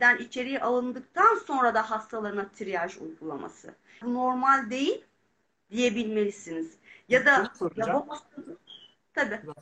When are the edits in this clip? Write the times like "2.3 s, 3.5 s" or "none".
4.0 s